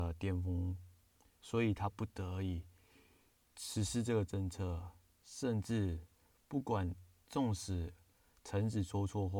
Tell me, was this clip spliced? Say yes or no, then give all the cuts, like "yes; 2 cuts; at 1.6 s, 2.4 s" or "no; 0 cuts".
no; 0 cuts